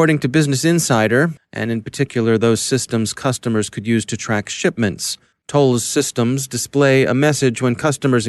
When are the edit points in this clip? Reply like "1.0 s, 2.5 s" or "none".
1.4 s, 5.3 s